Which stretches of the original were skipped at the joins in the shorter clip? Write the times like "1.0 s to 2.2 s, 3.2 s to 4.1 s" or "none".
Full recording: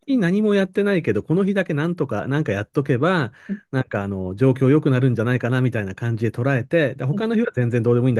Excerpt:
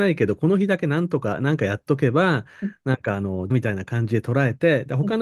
4.4 s to 5.6 s